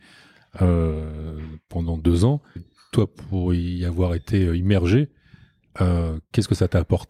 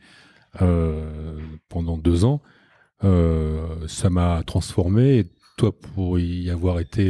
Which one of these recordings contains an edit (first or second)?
first